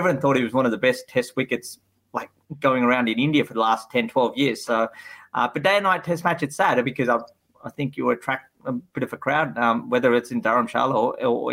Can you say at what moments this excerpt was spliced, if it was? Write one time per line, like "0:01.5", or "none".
none